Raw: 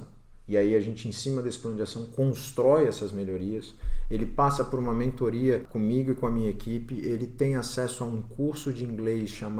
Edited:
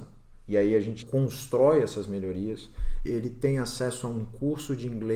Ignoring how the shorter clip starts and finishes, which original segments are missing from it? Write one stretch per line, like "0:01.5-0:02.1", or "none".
0:01.0-0:02.1
0:04.1-0:07.0